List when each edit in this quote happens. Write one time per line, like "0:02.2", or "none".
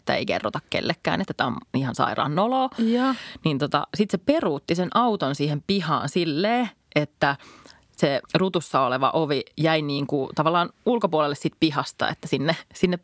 0:08.2